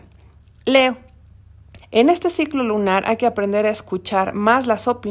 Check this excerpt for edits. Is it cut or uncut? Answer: cut